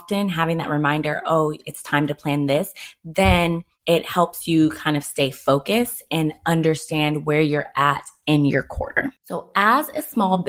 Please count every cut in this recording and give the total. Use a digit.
1